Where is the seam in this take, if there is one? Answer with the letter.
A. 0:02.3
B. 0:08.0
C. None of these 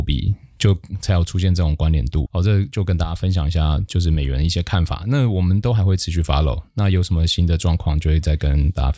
A